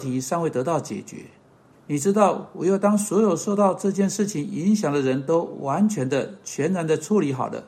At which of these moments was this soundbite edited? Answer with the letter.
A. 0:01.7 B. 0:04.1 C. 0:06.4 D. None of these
A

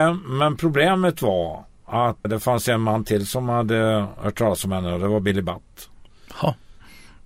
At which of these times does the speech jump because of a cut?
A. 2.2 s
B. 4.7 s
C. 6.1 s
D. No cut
A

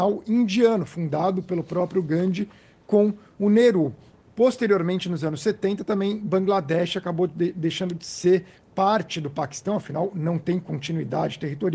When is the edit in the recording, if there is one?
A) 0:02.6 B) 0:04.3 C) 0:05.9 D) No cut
B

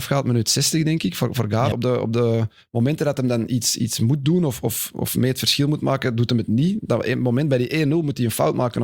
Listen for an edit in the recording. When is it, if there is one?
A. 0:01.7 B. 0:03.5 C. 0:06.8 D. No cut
A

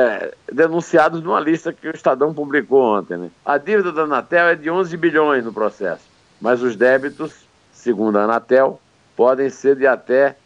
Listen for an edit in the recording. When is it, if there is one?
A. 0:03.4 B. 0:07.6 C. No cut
A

